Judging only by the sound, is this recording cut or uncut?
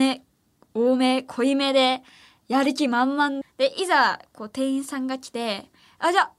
cut